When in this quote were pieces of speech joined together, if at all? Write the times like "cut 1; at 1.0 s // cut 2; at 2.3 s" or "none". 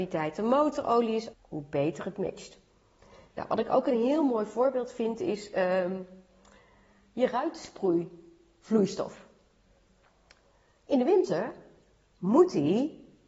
cut 1; at 1.3 s